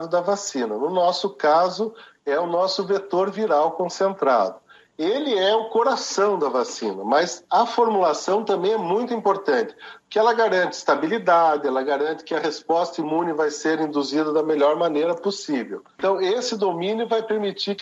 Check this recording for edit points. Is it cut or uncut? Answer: uncut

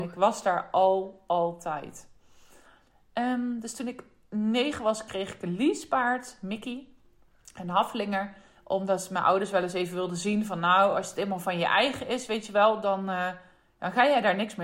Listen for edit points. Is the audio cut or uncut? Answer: uncut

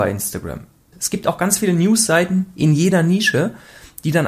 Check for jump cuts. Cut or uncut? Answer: cut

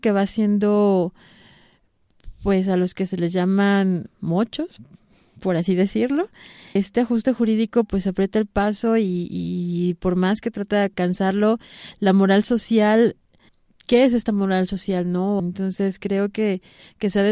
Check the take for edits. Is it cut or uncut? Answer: cut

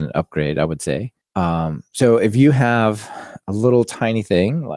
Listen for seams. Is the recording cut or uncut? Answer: uncut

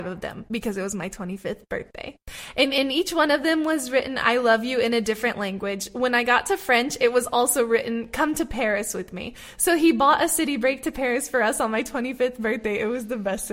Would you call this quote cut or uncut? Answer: uncut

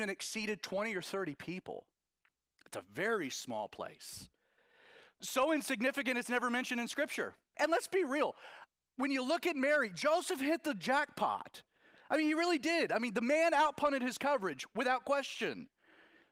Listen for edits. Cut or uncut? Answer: cut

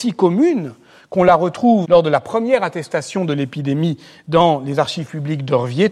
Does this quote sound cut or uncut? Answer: cut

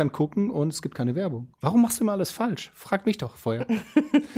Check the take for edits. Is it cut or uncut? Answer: cut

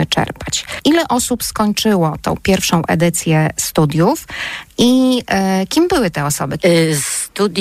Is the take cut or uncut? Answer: cut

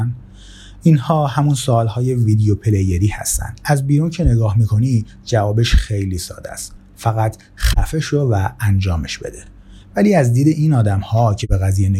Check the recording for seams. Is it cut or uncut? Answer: uncut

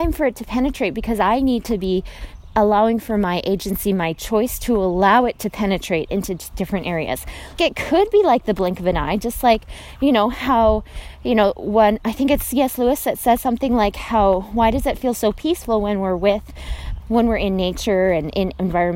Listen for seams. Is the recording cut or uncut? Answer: cut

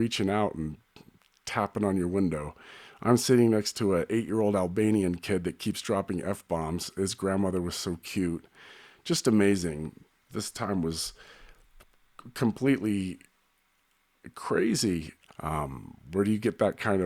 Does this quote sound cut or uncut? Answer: cut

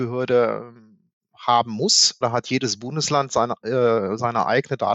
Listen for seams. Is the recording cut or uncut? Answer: cut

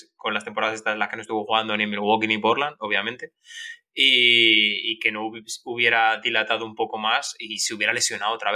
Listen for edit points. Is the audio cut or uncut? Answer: uncut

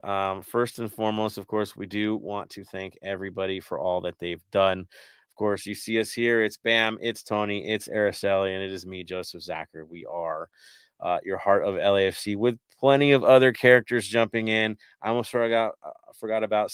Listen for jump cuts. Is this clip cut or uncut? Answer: uncut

